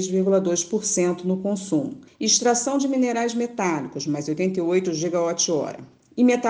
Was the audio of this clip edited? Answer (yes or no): yes